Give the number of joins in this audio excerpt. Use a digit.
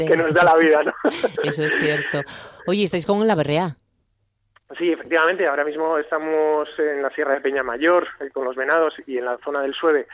0